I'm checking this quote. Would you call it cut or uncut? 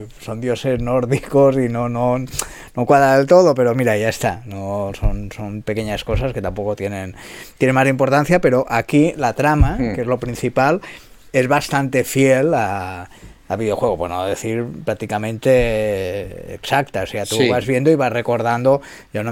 uncut